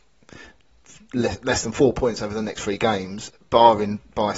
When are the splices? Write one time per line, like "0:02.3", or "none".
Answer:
none

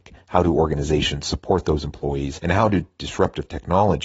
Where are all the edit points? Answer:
0:02.4

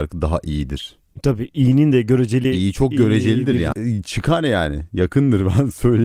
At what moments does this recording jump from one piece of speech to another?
0:03.7

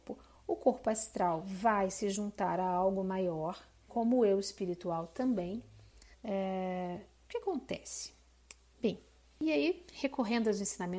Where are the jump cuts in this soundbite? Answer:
0:03.9
0:06.1

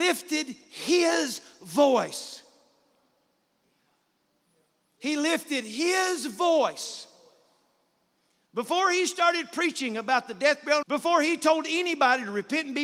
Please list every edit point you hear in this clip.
0:10.8

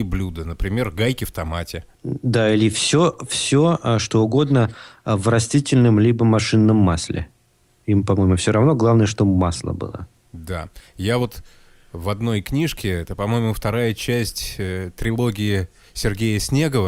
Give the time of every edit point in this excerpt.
none

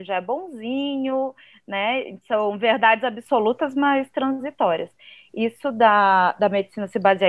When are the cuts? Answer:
none

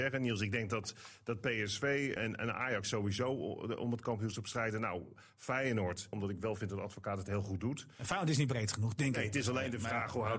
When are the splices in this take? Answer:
0:02.2
0:06.1

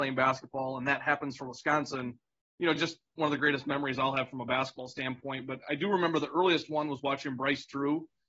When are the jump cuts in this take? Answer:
none

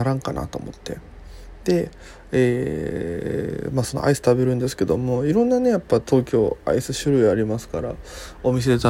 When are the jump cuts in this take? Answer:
none

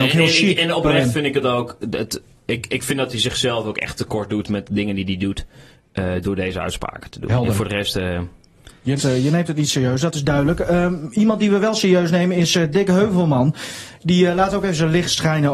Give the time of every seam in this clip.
0:09.0

